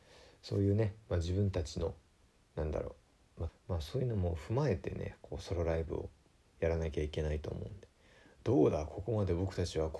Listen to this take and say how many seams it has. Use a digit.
1